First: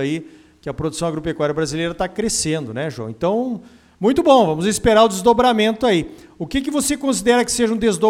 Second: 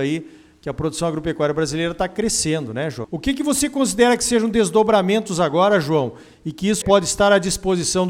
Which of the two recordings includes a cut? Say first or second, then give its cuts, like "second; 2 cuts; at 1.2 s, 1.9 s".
second; 2 cuts; at 3.0 s, 6.8 s